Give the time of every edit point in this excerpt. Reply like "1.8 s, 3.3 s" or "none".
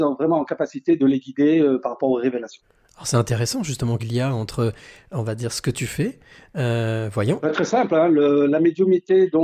4.0 s, 7.4 s